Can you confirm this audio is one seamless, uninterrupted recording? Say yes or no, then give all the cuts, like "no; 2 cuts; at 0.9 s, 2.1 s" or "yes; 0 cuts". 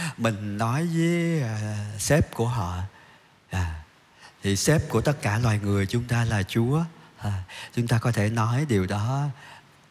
yes; 0 cuts